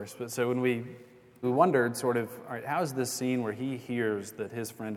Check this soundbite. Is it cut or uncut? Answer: cut